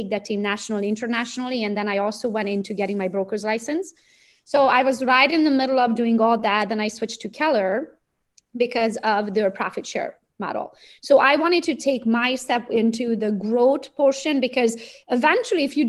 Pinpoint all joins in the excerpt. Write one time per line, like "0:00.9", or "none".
none